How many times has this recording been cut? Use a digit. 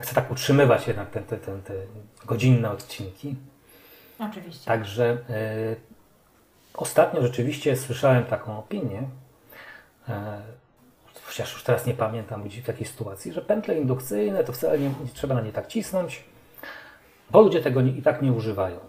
0